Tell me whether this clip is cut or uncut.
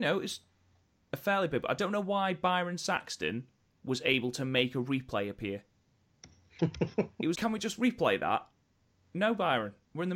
cut